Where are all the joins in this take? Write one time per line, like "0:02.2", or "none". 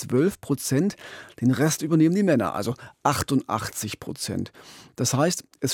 none